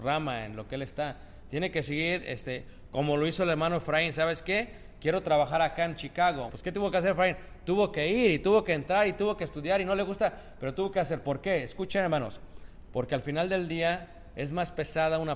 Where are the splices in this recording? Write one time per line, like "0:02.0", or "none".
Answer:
0:06.5